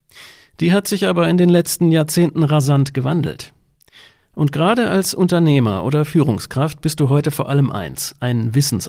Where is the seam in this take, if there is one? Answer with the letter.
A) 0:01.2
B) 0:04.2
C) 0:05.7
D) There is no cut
D